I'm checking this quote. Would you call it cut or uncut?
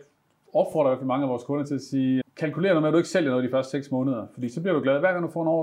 cut